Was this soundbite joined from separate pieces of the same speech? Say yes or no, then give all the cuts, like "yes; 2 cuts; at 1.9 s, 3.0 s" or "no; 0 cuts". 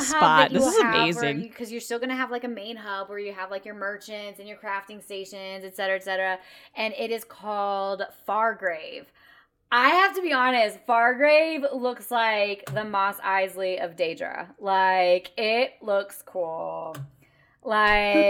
no; 0 cuts